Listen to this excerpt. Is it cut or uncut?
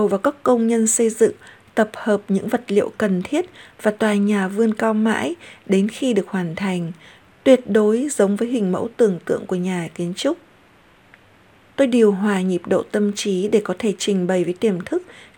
cut